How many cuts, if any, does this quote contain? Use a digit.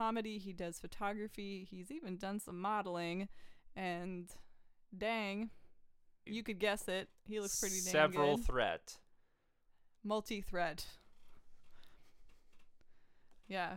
1